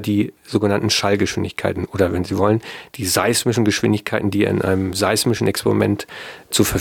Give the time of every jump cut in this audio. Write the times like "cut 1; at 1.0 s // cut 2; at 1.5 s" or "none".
none